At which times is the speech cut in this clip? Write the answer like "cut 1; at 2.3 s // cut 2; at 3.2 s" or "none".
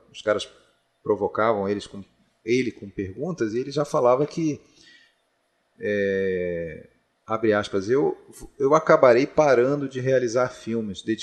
none